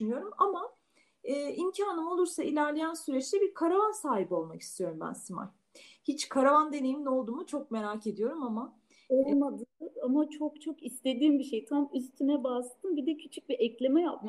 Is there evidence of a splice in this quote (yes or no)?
no